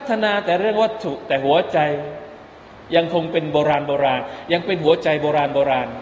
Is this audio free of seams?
yes; 0 cuts

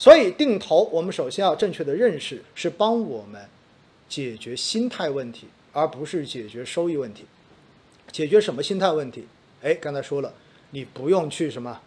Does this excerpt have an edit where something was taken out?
yes; 1 cut; at 2.4 s

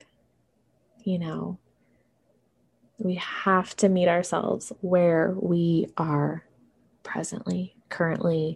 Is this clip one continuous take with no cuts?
no; 1 cut; at 2.8 s

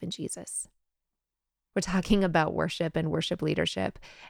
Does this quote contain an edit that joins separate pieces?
yes; 1 cut; at 1.7 s

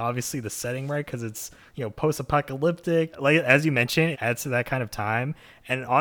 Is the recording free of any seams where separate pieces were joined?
no; 2 cuts; at 3.1 s, 4.1 s

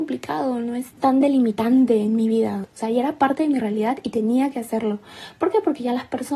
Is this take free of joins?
no; 2 cuts; at 0.9 s, 2.6 s

